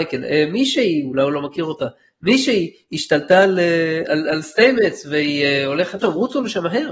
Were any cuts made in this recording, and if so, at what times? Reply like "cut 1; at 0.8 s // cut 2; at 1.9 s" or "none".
cut 1; at 4.1 s // cut 2; at 6.0 s